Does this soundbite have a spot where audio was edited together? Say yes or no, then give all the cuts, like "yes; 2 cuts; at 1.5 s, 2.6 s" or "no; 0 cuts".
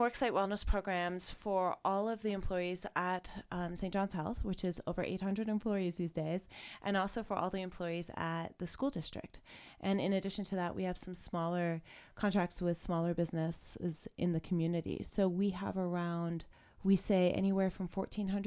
no; 0 cuts